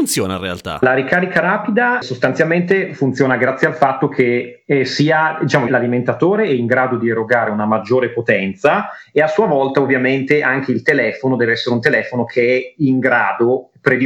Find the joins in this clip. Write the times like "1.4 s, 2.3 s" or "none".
2.0 s, 5.7 s